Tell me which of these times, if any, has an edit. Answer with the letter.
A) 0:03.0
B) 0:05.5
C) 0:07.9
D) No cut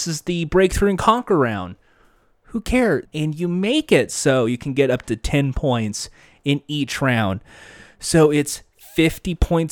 A